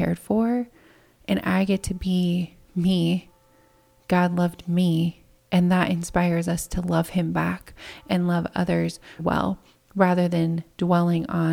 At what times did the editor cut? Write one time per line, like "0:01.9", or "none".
0:02.6
0:09.2